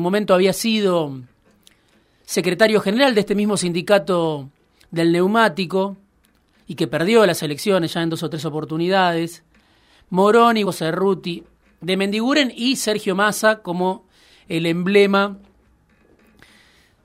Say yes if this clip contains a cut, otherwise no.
yes